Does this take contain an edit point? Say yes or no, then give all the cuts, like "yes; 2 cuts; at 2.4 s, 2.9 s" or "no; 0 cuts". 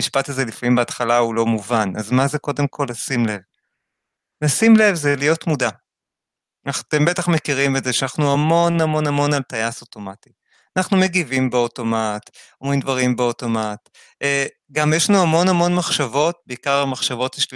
no; 0 cuts